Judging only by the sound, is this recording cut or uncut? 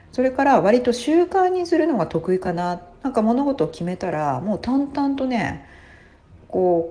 uncut